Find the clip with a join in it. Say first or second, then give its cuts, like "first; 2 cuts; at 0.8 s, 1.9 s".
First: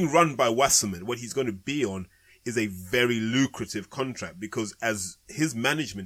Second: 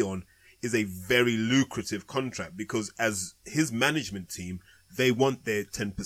first; 1 cut; at 1.0 s